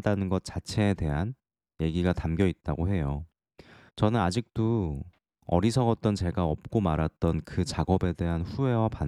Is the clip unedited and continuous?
no; 1 cut; at 3.9 s

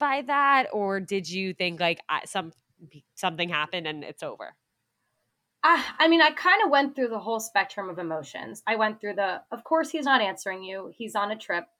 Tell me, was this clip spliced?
no; 0 cuts

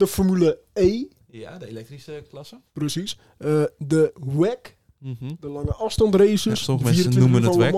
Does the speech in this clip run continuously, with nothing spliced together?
yes; 0 cuts

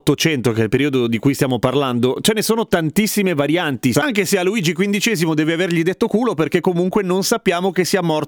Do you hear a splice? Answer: yes; 1 cut; at 3.9 s

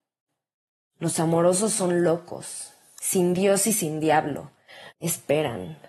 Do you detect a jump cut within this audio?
yes; 2 cuts; at 3.0 s, 4.9 s

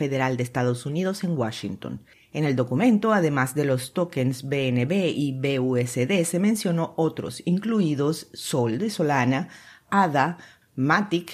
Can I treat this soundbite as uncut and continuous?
yes; 0 cuts

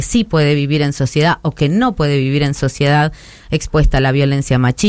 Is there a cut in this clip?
yes; 1 cut; at 3.4 s

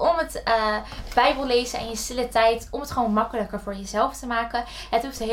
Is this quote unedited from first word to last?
yes; 0 cuts

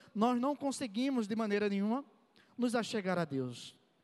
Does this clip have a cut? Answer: no; 0 cuts

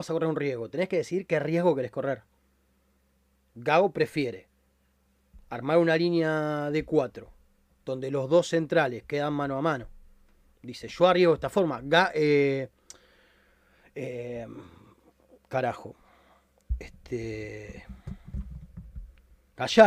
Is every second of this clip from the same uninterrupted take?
yes; 0 cuts

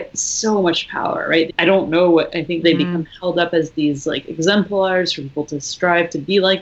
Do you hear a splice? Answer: yes; 2 cuts; at 1.5 s, 2.6 s

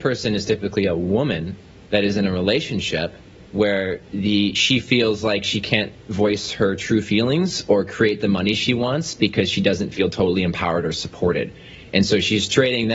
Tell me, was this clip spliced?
no; 0 cuts

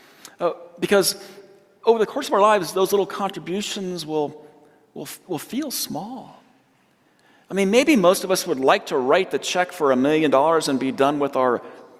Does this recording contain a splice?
no; 0 cuts

